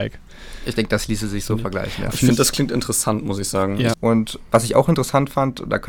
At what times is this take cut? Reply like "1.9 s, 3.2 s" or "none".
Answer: 3.9 s